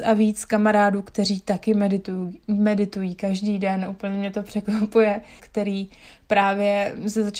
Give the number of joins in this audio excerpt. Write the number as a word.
one